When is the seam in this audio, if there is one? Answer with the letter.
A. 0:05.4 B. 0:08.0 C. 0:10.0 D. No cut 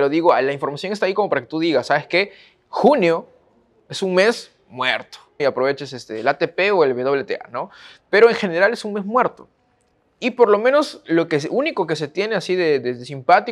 A